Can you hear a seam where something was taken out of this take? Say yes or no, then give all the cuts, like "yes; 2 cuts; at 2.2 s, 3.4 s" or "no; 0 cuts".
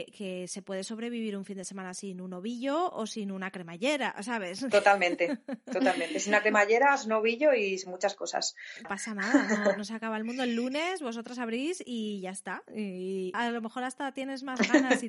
yes; 2 cuts; at 8.8 s, 13.3 s